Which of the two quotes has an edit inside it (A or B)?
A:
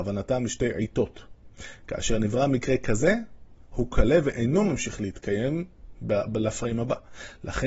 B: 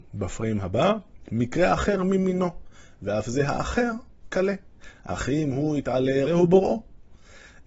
B